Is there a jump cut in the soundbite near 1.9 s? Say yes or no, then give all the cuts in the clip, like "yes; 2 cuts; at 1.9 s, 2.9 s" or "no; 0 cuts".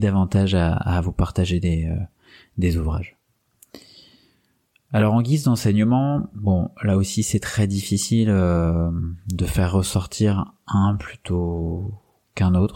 no; 0 cuts